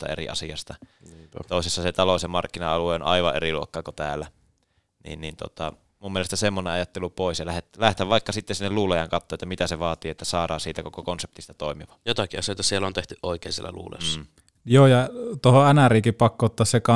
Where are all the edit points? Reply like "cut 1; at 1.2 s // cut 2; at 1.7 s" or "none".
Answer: none